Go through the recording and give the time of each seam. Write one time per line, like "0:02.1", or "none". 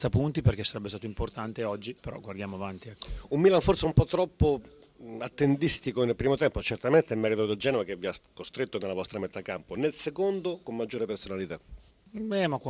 none